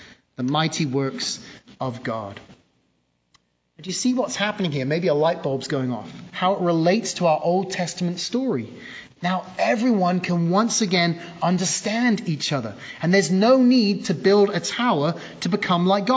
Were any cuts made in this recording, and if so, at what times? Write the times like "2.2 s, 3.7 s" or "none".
9.2 s